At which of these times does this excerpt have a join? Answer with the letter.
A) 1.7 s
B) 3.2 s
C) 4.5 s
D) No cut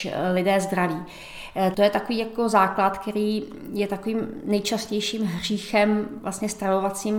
A